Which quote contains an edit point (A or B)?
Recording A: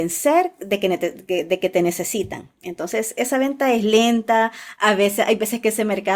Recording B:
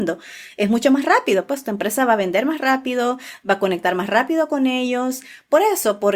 A